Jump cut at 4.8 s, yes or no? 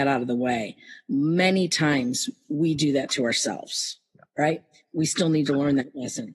yes